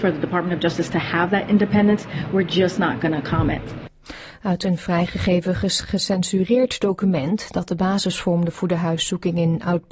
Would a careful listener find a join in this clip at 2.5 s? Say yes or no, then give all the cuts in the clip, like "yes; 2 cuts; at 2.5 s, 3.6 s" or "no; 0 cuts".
no; 0 cuts